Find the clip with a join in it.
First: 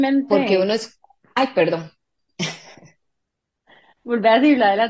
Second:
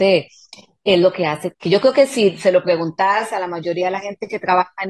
second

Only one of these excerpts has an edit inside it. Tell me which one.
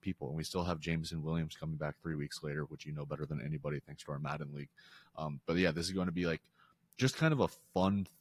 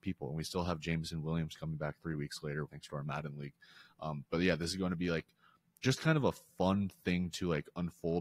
second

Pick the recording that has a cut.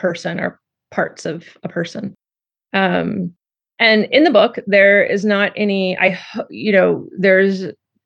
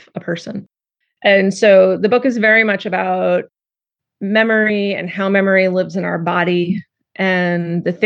second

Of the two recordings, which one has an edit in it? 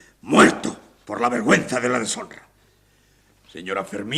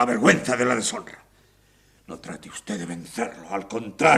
second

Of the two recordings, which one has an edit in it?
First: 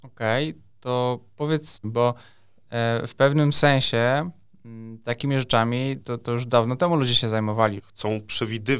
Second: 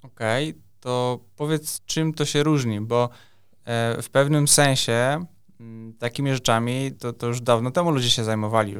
first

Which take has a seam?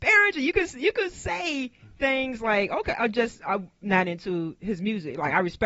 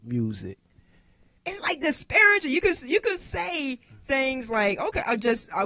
second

